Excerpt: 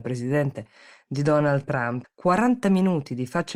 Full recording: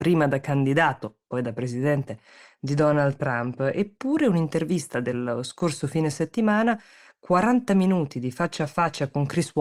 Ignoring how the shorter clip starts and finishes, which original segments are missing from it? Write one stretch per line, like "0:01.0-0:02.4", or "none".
0:03.6-0:07.1